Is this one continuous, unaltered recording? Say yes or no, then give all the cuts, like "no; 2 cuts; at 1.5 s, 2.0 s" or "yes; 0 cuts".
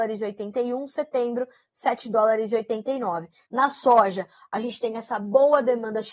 no; 1 cut; at 3.4 s